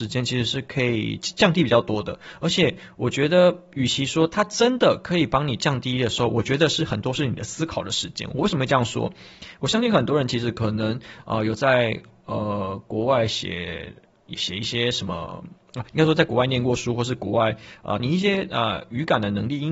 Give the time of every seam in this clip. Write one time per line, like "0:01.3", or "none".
0:18.0